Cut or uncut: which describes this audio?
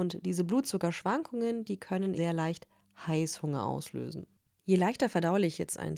cut